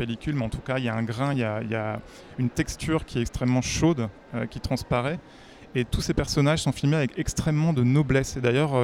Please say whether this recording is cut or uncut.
uncut